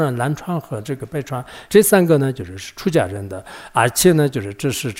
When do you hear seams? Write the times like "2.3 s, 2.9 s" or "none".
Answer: 1.7 s

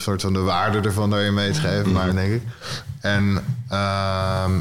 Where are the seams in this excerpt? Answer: 2.1 s

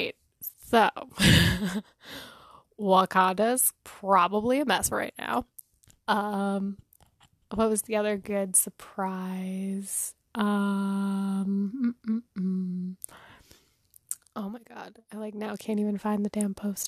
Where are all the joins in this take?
none

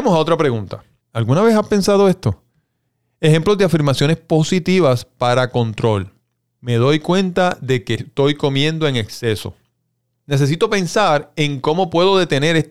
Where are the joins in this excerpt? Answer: 1.0 s

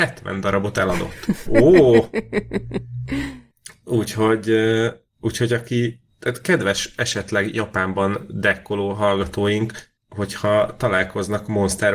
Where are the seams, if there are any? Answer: 1.5 s

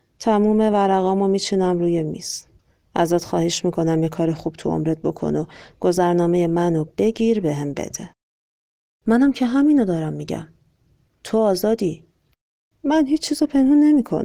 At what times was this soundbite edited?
12.7 s

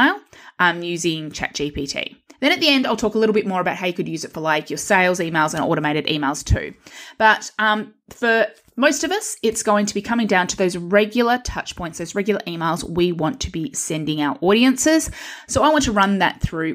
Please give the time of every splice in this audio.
none

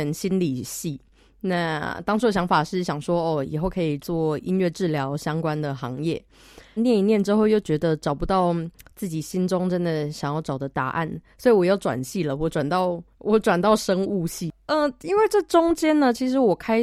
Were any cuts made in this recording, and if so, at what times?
4.0 s, 6.8 s, 13.1 s

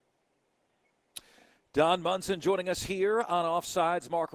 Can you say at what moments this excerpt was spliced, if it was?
none

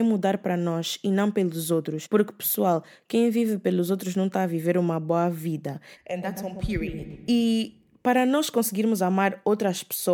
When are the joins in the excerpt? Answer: 5.9 s

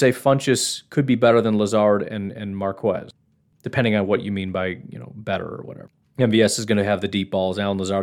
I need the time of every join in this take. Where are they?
none

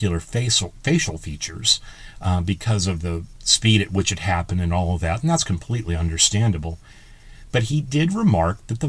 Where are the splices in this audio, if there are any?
none

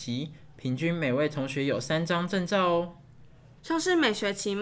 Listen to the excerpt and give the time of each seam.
3.6 s

